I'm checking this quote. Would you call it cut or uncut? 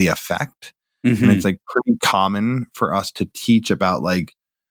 uncut